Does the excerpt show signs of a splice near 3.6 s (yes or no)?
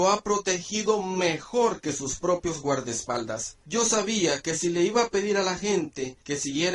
yes